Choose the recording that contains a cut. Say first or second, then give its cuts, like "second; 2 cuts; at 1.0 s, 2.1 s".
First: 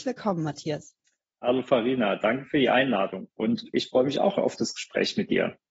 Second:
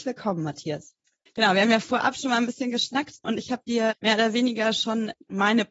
second; 1 cut; at 1.3 s